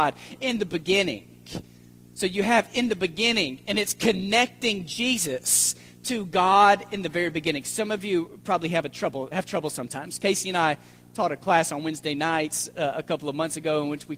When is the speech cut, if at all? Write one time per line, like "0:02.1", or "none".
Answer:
0:09.3